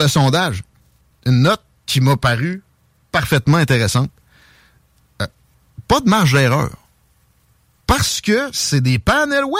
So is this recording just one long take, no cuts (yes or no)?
yes